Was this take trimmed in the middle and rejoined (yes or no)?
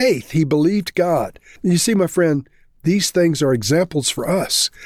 yes